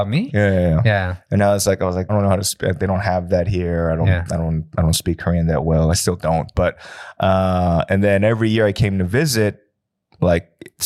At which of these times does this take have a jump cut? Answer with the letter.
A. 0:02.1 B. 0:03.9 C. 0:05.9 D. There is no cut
A